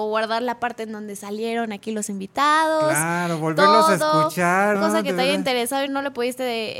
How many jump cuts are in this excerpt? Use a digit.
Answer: 2